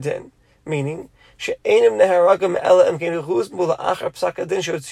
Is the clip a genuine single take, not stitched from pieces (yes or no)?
yes